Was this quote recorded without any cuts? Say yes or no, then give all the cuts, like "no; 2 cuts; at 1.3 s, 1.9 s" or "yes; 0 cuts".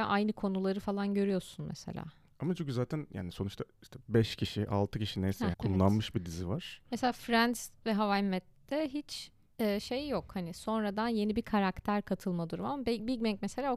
no; 1 cut; at 5.5 s